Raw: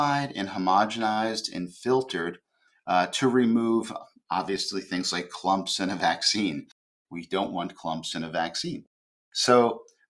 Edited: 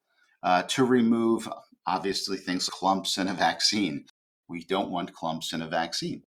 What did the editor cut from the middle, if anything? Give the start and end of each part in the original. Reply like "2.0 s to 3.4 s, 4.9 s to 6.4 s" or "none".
5.1 s to 5.3 s

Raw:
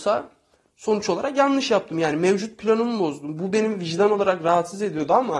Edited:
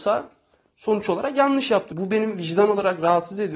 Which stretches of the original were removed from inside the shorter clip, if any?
1.9 s to 3.3 s

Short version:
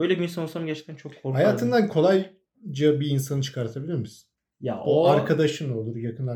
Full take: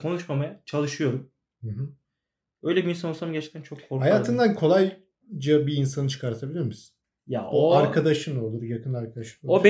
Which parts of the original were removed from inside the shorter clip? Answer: none

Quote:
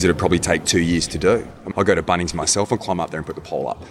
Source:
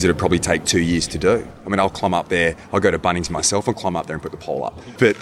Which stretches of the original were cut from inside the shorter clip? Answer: 1.7 s to 2.7 s

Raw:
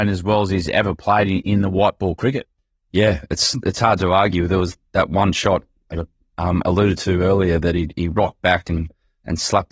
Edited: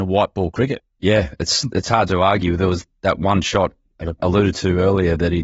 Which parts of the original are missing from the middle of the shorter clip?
2.6 s to 2.8 s, 6.1 s to 6.6 s

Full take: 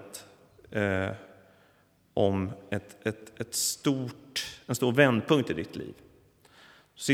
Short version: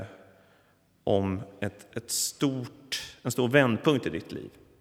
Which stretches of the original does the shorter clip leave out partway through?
3.0 s to 3.3 s

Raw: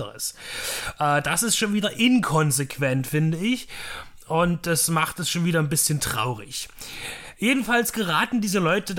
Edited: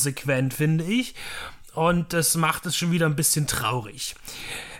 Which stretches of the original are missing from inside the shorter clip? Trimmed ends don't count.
none

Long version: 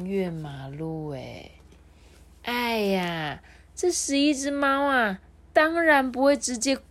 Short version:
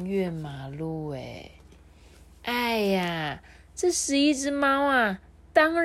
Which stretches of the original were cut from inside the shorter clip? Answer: none

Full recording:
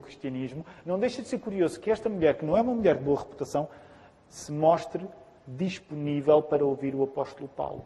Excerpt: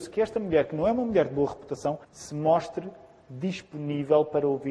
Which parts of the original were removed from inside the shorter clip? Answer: 3.7 s to 4.2 s

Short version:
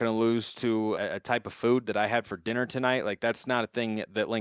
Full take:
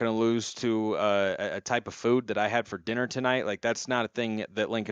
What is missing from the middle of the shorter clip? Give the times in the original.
1.0 s to 1.4 s

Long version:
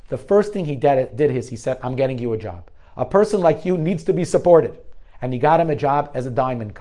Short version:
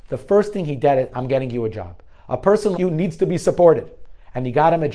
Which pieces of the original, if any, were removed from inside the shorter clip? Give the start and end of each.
1.1 s to 1.8 s, 3.4 s to 3.6 s

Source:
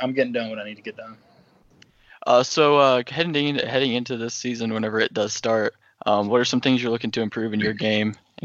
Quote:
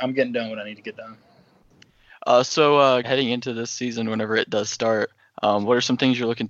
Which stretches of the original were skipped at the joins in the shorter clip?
3.0 s to 3.7 s

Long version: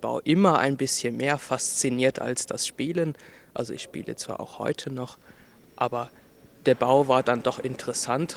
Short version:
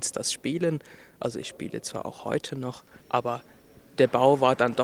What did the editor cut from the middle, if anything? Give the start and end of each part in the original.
5.4 s to 5.7 s

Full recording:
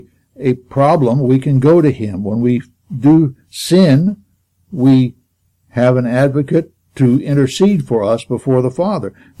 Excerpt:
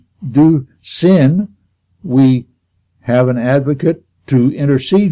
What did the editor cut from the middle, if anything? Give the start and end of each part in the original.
none

